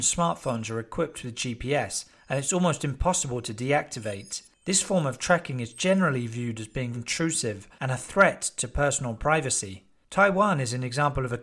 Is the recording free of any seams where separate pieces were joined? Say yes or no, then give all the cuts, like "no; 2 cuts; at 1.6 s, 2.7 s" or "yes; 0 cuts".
no; 1 cut; at 6.9 s